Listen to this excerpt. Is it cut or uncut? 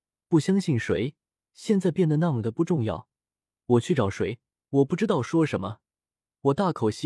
cut